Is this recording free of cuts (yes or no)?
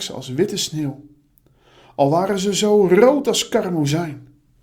yes